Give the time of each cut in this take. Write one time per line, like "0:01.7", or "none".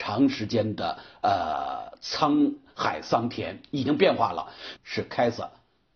0:04.8

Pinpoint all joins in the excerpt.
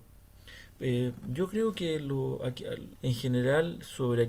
0:02.9

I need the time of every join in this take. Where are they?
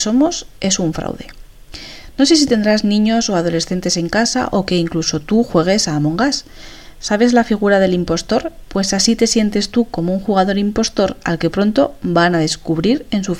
0:08.6

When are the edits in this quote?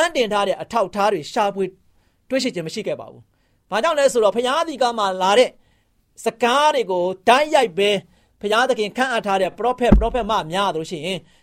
none

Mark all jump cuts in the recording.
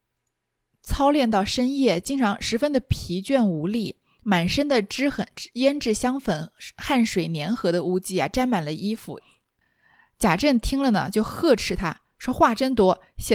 0:09.2

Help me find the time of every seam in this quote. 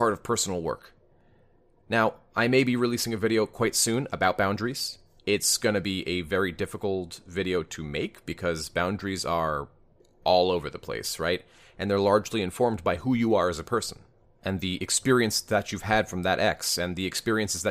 none

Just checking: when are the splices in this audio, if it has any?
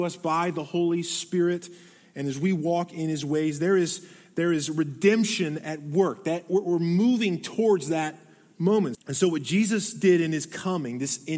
0:08.9

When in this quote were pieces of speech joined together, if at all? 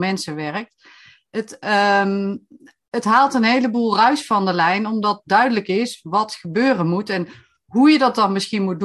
none

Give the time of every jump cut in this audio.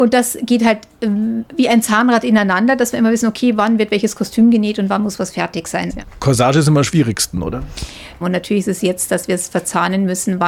0:05.9
0:08.2

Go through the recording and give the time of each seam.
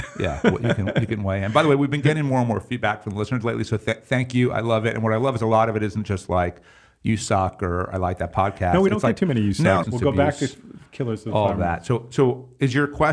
0:09.8

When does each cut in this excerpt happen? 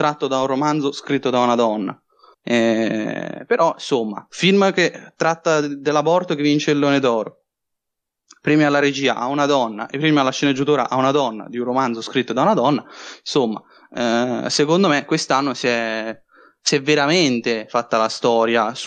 0:02.3

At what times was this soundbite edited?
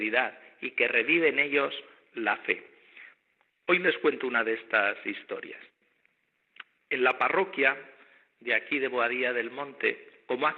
none

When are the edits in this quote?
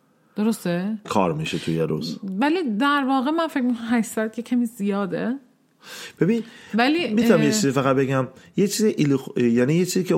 0:01.0

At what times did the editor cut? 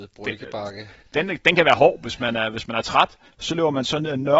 0:01.0
0:03.3

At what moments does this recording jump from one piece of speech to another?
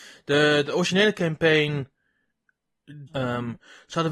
0:03.1

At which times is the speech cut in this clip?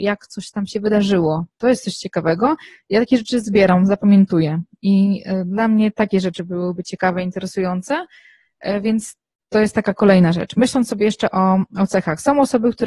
none

